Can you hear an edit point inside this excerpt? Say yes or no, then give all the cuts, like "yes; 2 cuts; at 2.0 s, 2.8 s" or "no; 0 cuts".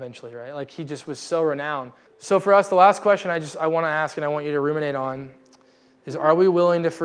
yes; 1 cut; at 2.1 s